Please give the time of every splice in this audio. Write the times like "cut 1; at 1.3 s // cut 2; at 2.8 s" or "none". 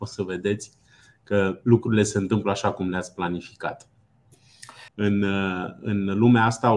cut 1; at 4.9 s